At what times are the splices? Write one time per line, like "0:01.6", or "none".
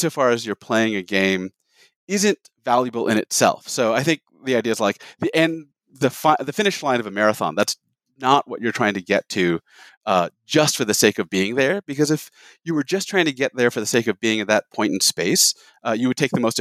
none